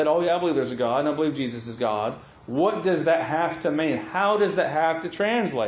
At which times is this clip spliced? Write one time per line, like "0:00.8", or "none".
none